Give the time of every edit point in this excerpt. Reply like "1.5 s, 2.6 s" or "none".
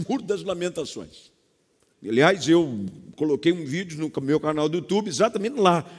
1.9 s